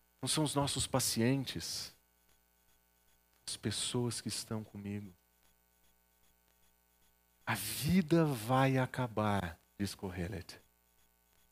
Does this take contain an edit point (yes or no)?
yes